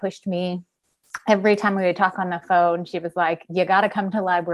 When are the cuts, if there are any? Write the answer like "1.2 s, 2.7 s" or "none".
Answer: none